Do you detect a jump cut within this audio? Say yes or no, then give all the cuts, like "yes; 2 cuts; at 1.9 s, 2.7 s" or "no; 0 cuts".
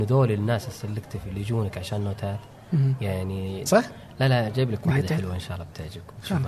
yes; 1 cut; at 3.7 s